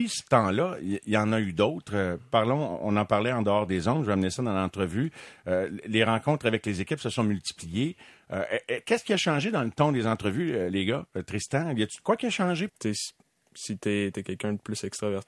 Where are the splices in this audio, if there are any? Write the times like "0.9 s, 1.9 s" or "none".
12.7 s, 14.1 s